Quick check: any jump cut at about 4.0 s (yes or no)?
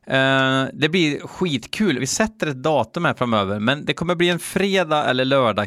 no